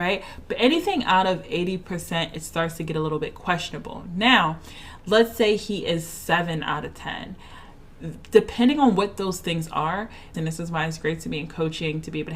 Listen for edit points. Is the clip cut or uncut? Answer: cut